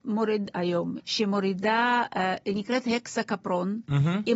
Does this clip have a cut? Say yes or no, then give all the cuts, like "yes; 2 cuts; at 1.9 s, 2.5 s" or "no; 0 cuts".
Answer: yes; 1 cut; at 1.0 s